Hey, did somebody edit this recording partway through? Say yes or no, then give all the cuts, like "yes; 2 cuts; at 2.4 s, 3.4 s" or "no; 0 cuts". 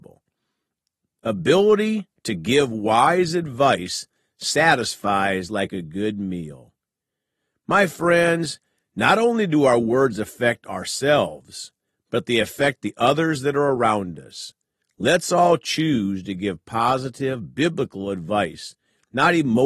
no; 0 cuts